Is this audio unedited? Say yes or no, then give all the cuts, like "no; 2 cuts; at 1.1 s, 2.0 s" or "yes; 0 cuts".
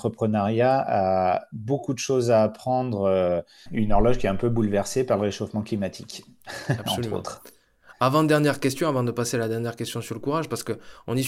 no; 1 cut; at 3.7 s